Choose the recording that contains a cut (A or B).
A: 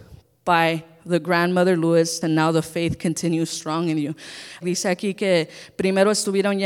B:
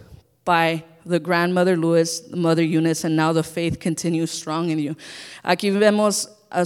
A